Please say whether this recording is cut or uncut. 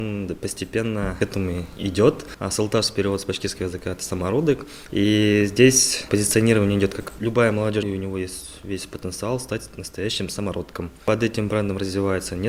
cut